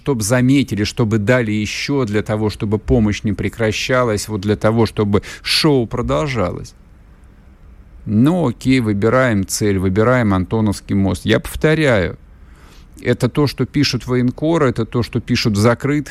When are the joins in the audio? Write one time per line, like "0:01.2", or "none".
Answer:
none